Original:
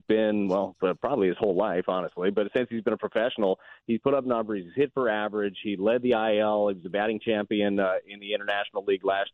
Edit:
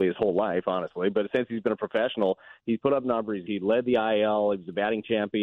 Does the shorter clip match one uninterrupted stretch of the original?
no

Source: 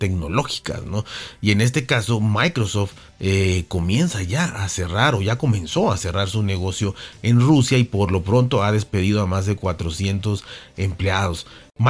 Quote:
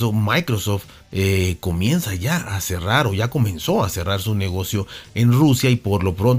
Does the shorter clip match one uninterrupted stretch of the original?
yes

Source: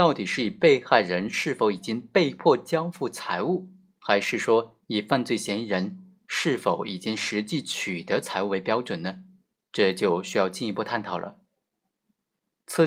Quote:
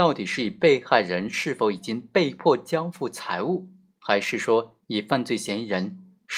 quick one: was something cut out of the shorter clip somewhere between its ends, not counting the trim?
no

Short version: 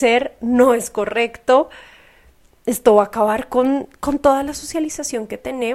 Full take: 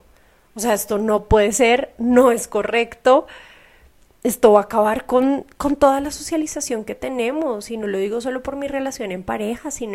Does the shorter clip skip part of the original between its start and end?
no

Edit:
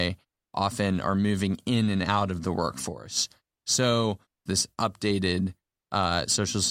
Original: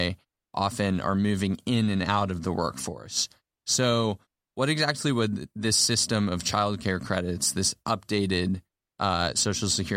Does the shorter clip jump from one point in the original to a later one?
yes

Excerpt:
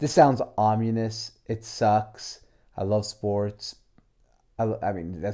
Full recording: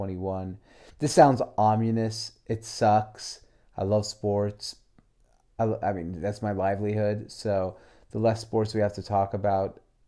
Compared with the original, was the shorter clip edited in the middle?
no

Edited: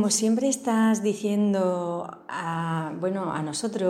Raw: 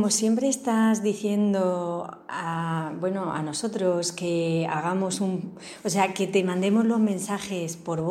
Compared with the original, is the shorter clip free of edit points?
yes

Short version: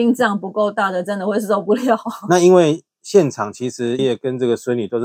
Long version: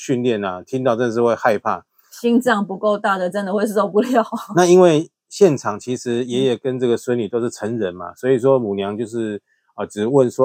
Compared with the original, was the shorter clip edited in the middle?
yes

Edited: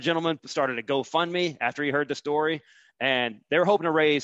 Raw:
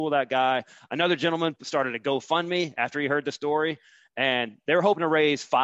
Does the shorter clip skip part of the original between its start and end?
no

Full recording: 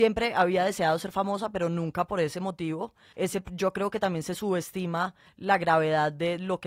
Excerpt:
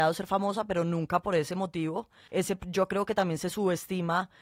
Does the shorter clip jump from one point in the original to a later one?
no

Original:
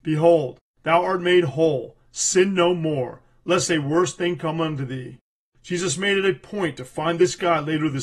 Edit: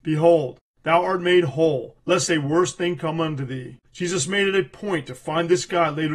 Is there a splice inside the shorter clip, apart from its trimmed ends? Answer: yes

